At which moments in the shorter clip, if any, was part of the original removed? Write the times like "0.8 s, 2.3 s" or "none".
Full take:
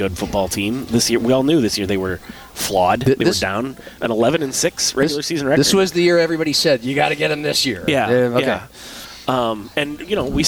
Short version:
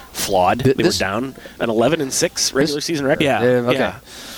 3.1 s